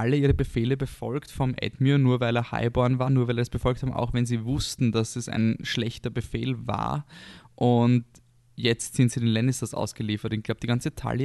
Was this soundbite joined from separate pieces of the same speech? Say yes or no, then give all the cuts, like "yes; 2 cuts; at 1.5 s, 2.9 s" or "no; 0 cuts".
no; 0 cuts